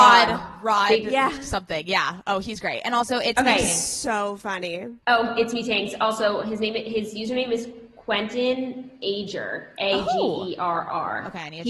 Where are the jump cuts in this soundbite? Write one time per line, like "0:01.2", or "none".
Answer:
0:05.0